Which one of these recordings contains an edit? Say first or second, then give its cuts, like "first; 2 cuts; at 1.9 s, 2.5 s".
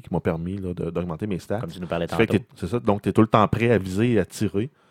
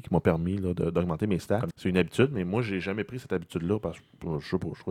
second; 1 cut; at 1.7 s